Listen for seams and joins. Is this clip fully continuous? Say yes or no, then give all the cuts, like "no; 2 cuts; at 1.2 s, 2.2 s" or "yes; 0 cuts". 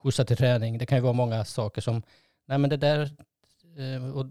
yes; 0 cuts